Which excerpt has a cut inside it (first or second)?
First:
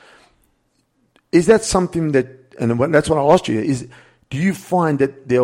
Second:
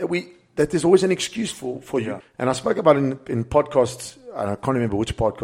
second